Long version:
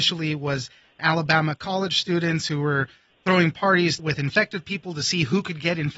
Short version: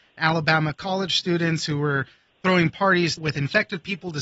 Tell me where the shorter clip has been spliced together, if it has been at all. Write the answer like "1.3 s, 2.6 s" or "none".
none